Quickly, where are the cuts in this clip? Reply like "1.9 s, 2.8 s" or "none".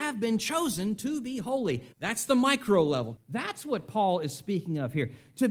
1.9 s, 3.2 s